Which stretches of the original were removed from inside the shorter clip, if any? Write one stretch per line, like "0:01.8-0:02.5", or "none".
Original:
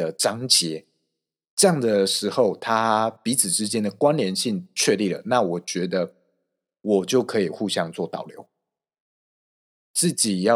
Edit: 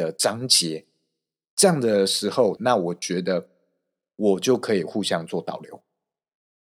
0:02.6-0:05.2